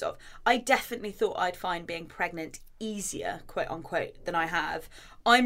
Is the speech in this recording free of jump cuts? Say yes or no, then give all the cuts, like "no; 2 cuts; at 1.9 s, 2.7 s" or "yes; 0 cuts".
yes; 0 cuts